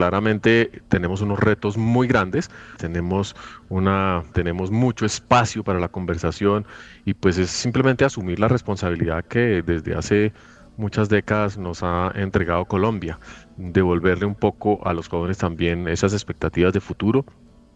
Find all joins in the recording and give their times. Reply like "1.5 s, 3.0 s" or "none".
2.8 s, 4.3 s